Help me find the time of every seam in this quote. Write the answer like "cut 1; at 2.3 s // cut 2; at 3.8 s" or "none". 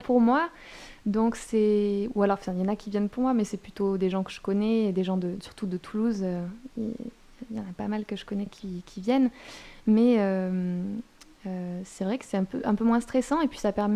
none